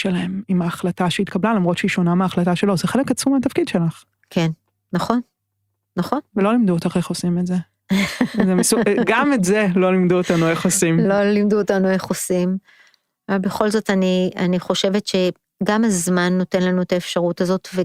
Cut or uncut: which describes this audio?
cut